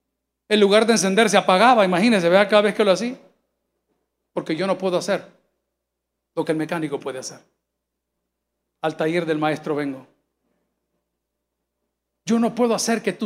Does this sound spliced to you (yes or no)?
no